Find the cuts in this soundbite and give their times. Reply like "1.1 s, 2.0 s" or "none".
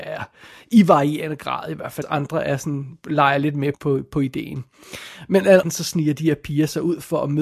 2.0 s, 3.7 s, 5.6 s